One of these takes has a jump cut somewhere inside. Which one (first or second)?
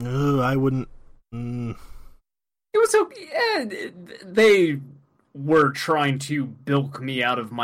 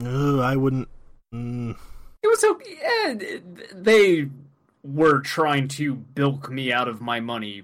second